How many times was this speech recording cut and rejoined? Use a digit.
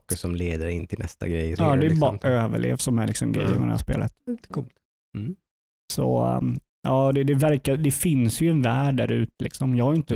2